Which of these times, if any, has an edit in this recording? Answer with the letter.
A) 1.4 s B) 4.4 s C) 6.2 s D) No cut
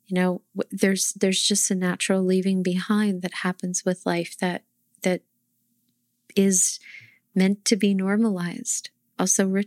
D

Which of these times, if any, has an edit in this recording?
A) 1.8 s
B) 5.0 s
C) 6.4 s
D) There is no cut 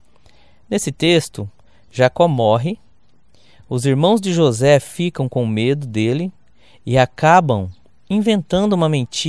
D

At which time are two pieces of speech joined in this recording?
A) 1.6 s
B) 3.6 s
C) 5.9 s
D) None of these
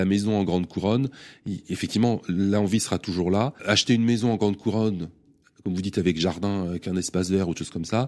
B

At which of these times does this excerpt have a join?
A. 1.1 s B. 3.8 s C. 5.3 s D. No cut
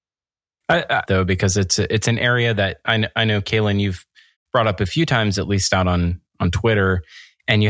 A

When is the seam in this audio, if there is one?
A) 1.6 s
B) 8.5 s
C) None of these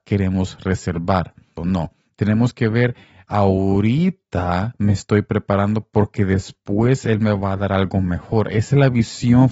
A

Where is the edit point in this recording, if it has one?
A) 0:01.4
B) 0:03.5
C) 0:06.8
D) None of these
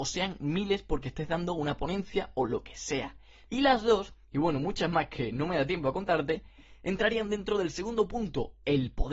B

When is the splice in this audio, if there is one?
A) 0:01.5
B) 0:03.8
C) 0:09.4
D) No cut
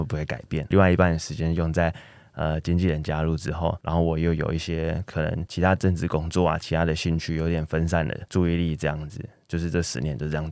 D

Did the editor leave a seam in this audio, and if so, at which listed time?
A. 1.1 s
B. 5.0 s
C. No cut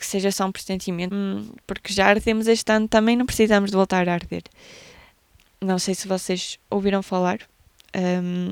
A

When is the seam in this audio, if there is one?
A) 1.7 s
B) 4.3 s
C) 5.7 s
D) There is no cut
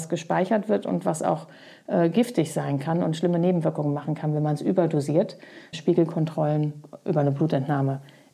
C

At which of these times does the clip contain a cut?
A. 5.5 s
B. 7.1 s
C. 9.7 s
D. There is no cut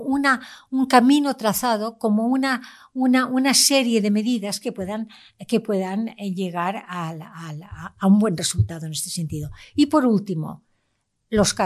D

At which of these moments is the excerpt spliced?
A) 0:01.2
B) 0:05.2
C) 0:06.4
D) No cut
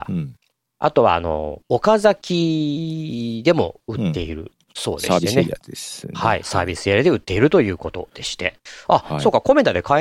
D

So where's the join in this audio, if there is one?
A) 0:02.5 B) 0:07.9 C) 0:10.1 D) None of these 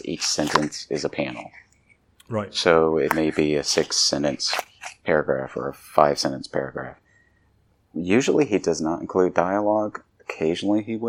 D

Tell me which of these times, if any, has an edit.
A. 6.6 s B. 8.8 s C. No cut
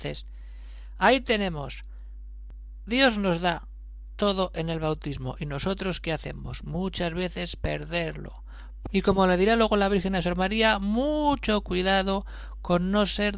B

